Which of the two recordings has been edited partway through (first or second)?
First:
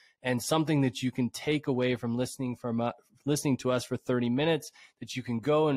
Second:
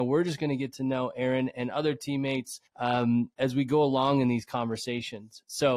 second